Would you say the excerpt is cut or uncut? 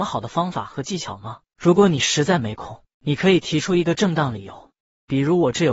cut